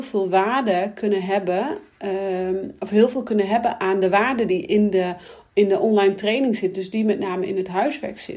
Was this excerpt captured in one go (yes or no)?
yes